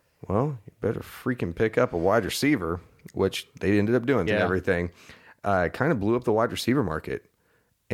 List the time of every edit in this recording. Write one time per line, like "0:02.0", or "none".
0:04.3